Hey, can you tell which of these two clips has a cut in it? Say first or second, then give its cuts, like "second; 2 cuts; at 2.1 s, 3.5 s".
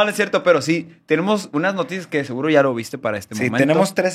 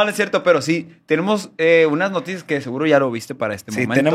first; 1 cut; at 1.5 s